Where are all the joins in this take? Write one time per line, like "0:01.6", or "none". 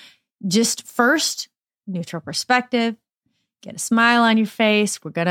0:01.7